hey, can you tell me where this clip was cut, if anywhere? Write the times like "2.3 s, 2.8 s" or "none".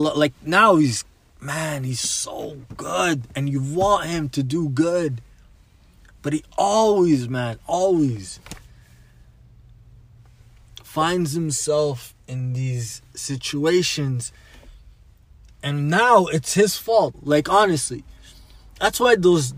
17.1 s